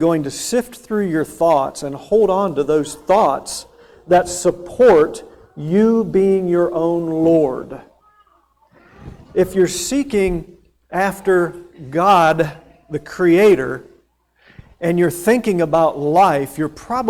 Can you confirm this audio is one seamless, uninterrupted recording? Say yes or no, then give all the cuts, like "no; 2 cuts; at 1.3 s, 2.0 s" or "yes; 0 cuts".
yes; 0 cuts